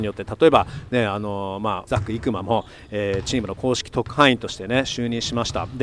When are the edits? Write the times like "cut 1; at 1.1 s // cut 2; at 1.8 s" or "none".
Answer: cut 1; at 1.9 s